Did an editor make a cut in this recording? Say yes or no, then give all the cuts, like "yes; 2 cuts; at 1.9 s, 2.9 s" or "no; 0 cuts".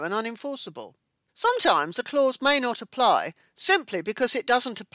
yes; 1 cut; at 1.3 s